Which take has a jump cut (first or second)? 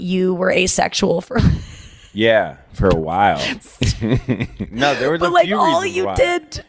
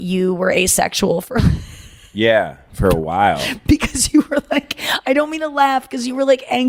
first